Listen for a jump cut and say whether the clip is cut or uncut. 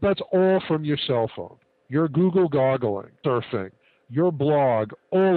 cut